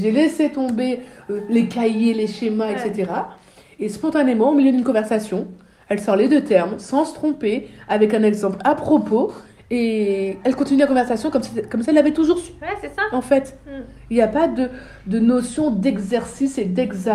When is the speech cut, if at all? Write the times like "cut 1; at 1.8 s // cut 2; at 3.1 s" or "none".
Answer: none